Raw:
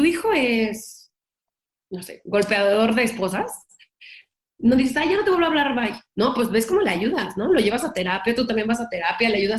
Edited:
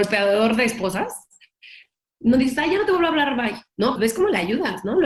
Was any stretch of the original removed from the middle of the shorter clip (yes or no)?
yes